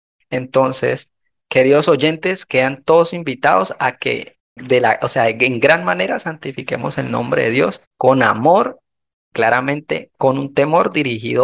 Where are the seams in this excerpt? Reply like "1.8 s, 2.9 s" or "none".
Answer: 4.6 s, 7.9 s